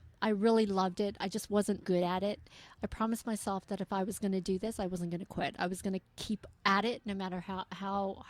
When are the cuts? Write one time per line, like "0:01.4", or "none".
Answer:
0:01.8